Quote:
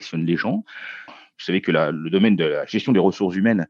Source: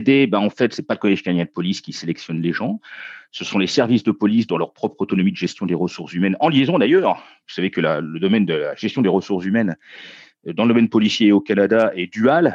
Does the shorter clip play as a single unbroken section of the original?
no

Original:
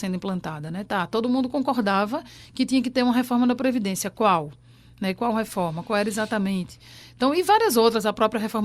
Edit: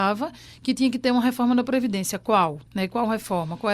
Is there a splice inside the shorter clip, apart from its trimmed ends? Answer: yes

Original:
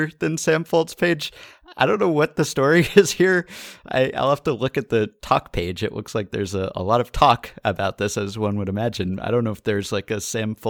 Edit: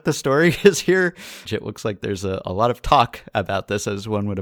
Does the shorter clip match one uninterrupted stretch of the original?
no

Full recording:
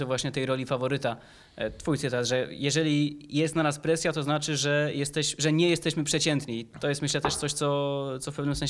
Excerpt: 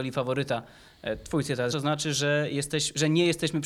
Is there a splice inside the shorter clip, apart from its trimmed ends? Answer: yes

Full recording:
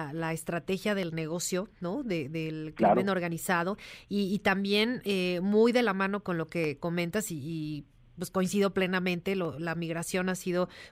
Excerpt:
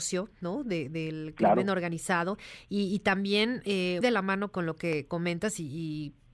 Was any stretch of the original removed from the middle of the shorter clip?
yes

